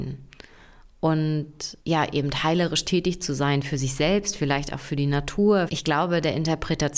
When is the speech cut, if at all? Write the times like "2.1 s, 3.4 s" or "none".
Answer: 1.8 s, 5.7 s